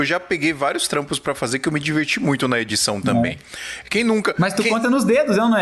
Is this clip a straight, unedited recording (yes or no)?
yes